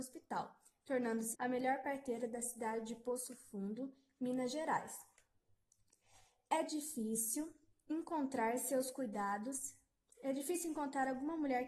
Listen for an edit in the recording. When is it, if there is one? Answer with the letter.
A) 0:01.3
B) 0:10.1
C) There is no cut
A